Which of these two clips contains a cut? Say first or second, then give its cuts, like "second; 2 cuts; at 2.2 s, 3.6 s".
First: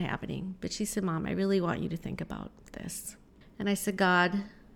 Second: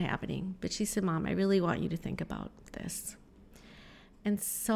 first; 1 cut; at 3.4 s